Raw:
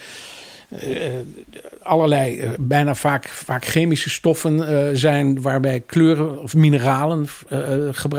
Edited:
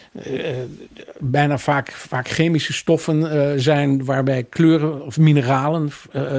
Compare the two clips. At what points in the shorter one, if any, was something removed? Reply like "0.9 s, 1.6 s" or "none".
1.2 s